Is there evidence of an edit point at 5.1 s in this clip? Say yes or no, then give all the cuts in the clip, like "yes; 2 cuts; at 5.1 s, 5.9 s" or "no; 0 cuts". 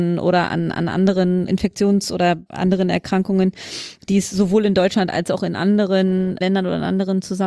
no; 1 cut; at 2.5 s